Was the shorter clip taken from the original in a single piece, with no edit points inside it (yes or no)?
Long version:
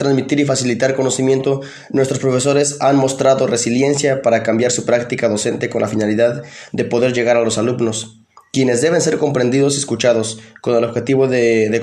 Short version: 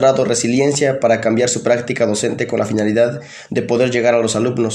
yes